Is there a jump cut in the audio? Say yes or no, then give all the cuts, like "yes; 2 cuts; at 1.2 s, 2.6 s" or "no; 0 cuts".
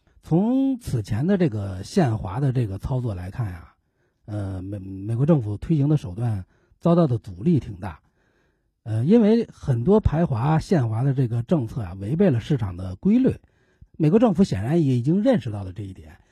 yes; 1 cut; at 13.8 s